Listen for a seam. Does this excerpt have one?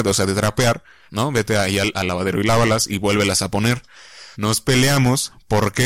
yes; 2 cuts; at 1.1 s, 4.3 s

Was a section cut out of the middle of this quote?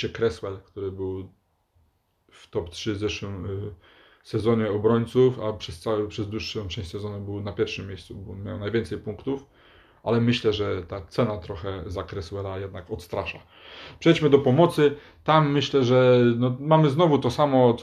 no; 0 cuts

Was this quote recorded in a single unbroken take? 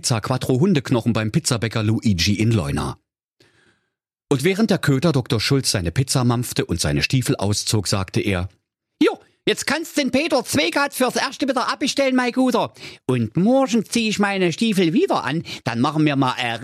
yes; 0 cuts

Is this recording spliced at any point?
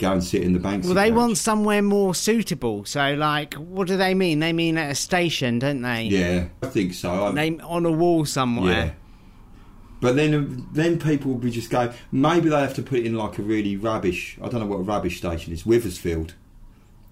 yes; 1 cut; at 6.6 s

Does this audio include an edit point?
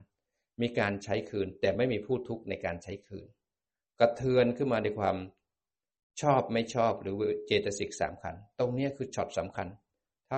no; 0 cuts

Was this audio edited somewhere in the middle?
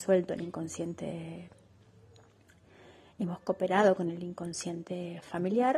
no; 0 cuts

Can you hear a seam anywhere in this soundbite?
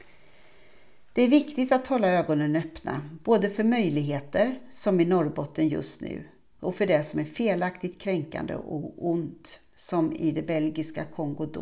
no; 0 cuts

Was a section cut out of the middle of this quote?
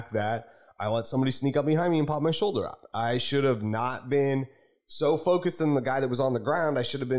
no; 0 cuts

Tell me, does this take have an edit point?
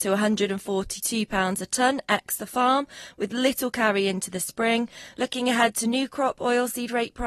yes; 1 cut; at 5.1 s

